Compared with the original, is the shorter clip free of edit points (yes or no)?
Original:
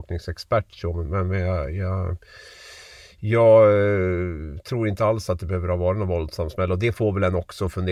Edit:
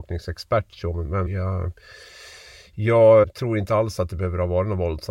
no